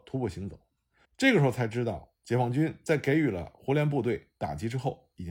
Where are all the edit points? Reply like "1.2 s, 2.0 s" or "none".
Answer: 1.0 s